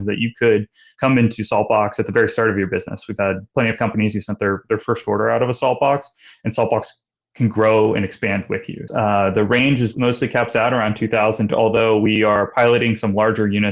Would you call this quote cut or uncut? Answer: cut